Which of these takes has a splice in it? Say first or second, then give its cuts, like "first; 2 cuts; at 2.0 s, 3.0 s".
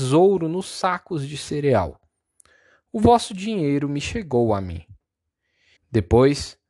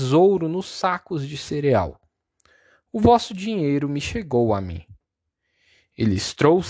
first; 1 cut; at 5.8 s